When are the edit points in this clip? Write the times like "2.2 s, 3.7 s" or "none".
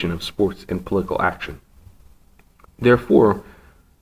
2.6 s